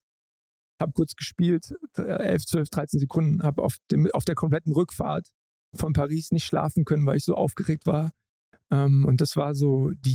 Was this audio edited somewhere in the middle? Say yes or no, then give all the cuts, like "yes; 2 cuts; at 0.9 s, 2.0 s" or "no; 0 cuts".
no; 0 cuts